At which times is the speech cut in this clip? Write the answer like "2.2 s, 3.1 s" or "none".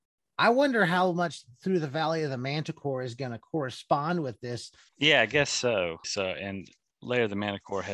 4.9 s, 6.0 s